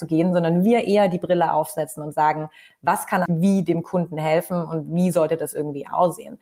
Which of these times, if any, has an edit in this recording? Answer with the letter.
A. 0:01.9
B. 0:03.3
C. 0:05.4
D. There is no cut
B